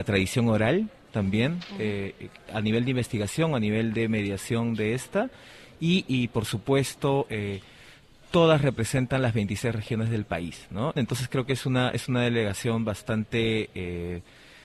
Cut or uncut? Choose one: cut